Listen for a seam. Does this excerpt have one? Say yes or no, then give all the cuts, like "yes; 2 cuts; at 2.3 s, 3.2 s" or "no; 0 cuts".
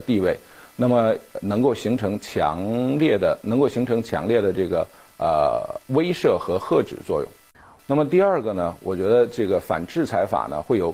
yes; 1 cut; at 7.8 s